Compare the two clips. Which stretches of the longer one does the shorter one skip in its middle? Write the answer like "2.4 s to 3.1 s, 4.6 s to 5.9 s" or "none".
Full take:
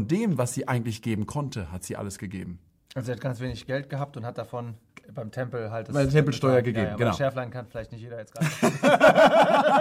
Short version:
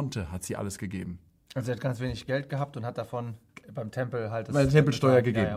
none